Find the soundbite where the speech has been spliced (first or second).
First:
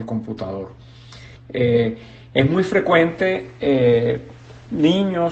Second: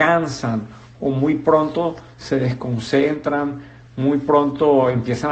first